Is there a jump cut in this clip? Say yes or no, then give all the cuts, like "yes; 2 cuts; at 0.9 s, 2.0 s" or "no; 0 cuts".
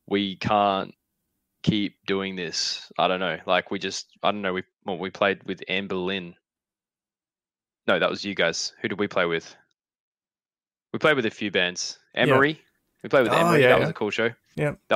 no; 0 cuts